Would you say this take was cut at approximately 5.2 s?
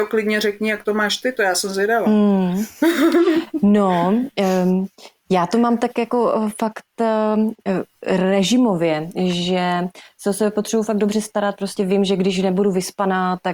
no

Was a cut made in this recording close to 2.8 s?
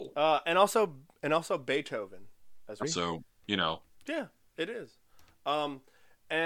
yes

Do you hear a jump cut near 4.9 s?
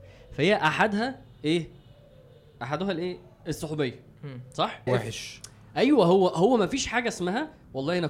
yes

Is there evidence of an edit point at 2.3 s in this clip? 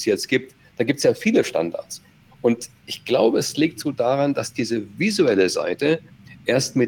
no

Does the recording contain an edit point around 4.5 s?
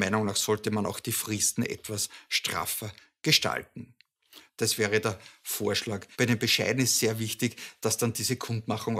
yes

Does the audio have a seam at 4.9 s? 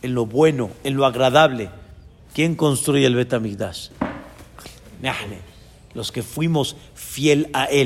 no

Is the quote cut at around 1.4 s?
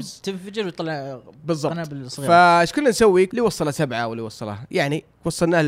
no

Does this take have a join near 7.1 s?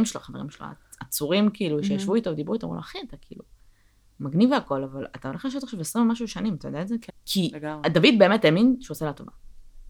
yes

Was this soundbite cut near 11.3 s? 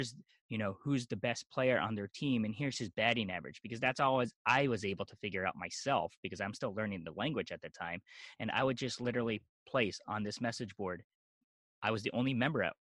no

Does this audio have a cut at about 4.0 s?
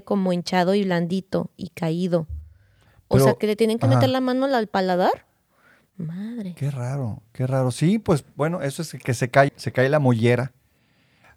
no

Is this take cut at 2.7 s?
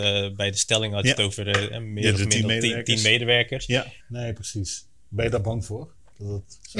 no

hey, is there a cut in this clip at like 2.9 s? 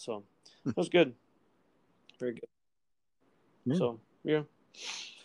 no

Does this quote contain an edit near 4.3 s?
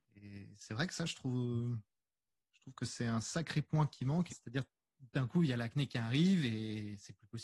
yes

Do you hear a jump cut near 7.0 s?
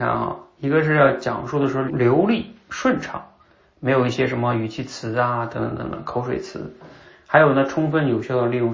no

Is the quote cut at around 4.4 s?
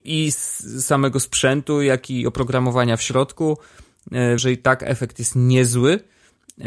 yes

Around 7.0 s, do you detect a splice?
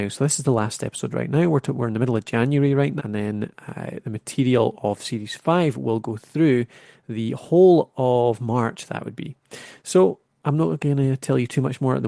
no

